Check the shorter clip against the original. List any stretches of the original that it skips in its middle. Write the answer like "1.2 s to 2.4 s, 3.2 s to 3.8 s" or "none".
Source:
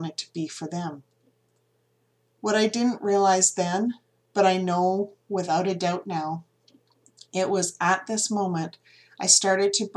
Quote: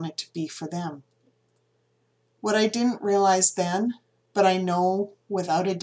none

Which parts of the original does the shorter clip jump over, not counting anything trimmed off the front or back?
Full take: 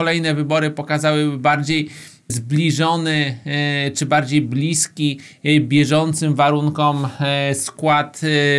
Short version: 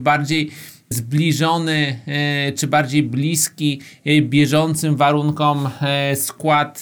none

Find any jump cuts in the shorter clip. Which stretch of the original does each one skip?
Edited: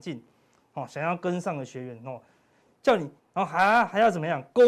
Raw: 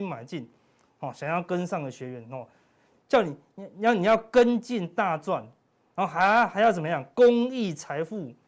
3.4 s to 5.8 s

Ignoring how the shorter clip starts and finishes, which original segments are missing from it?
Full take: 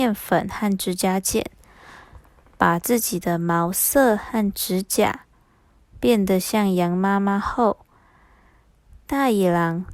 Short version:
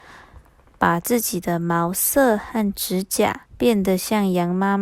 5.3 s to 5.9 s

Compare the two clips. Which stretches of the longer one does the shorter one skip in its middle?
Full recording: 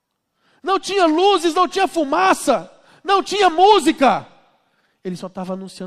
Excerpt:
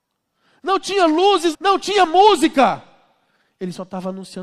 1.5 s to 3.0 s

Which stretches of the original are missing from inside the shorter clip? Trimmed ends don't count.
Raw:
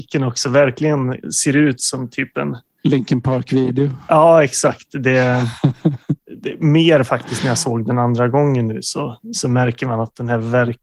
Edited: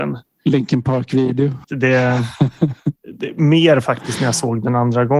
4.0 s to 4.9 s

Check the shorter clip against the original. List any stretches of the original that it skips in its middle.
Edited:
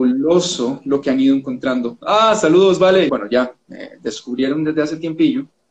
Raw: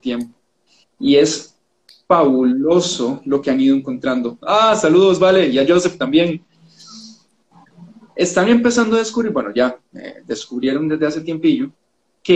5.5 s to 9.3 s

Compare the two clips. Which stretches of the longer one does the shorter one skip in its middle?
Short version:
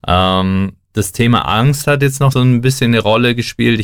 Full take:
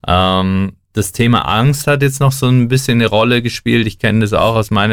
2.3 s to 2.4 s

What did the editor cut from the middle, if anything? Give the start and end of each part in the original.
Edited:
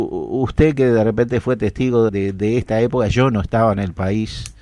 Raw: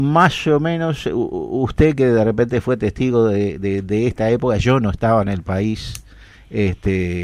3.3 s to 3.6 s

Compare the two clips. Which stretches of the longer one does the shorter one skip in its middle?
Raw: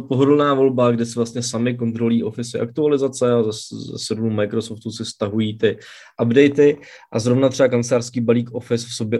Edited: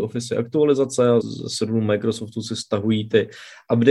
3.4 s to 3.7 s

